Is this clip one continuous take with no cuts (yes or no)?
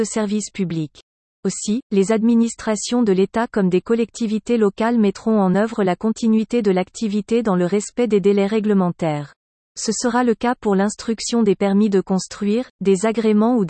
yes